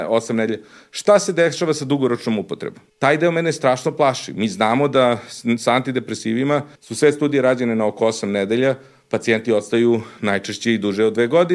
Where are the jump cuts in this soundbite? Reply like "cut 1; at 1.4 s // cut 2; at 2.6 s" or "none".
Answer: cut 1; at 2.9 s // cut 2; at 6.8 s